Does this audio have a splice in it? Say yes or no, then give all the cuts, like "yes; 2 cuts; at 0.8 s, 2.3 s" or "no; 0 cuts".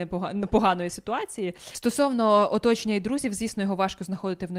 no; 0 cuts